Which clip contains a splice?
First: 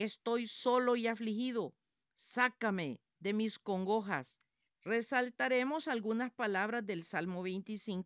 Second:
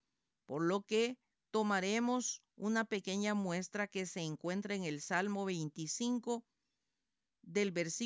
first; 2 cuts; at 2.0 s, 4.7 s

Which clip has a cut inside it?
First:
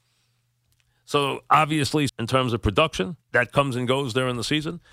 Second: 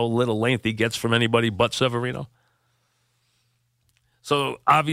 first; 2 cuts; at 2.1 s, 3.2 s

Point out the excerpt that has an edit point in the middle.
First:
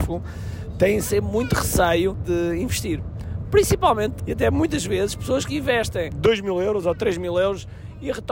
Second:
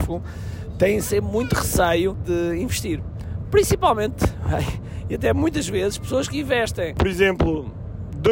first; 2 cuts; at 4.2 s, 6.1 s

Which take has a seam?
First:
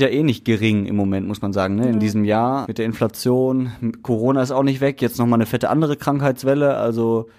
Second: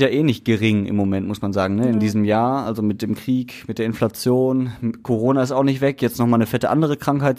first; 1 cut; at 2.6 s

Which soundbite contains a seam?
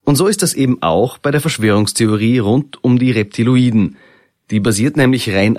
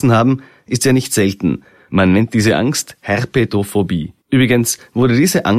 second; 1 cut; at 4.2 s

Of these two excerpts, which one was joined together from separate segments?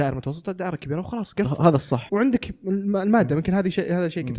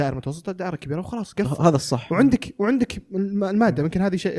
first; 1 cut; at 2.1 s

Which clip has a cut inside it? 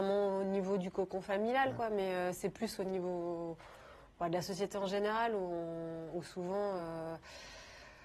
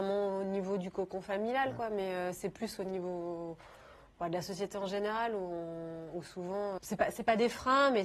second; 1 cut; at 6.8 s

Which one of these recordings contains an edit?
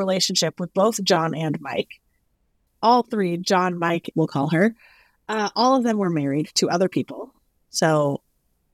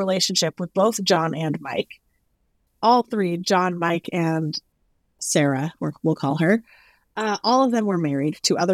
first; 1 cut; at 4.1 s

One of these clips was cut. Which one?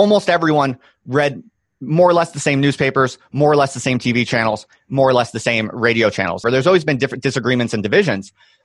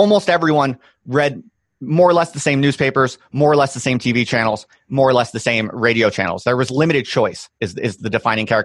first; 1 cut; at 6.4 s

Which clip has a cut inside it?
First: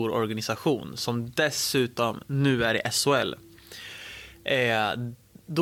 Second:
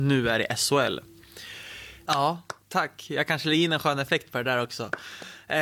second; 1 cut; at 2.1 s

